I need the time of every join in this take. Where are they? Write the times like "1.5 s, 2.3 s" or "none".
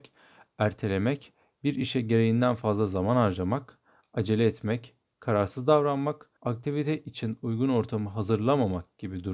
6.4 s